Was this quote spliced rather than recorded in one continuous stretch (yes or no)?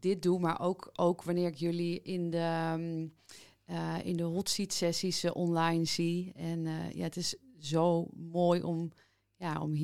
no